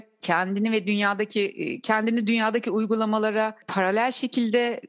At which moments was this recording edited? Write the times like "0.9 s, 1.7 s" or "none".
none